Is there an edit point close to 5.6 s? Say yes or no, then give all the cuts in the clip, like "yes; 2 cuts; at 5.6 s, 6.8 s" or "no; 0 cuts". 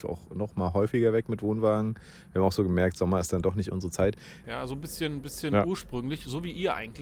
no; 1 cut; at 4.4 s